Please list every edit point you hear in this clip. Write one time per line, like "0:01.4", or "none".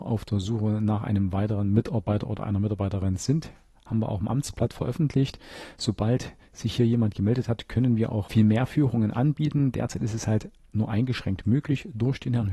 none